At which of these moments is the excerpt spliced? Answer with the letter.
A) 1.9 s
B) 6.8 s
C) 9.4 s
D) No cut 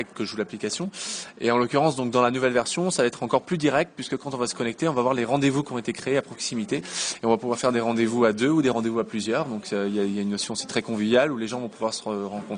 B